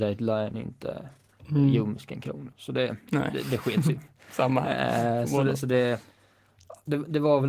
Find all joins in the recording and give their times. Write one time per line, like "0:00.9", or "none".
0:02.5